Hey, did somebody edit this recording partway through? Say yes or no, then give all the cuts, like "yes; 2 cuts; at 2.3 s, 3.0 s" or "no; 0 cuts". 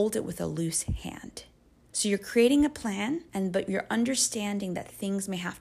yes; 2 cuts; at 1.9 s, 3.3 s